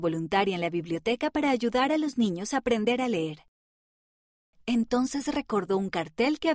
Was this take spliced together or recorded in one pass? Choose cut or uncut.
cut